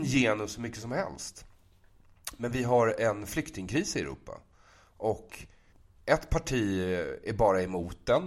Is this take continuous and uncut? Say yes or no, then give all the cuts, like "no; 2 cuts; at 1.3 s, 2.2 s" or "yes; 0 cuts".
yes; 0 cuts